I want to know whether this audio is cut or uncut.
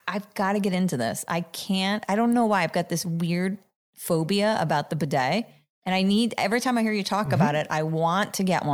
uncut